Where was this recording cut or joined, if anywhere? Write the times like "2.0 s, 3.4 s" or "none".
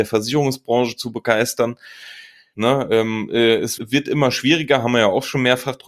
2.5 s, 3.8 s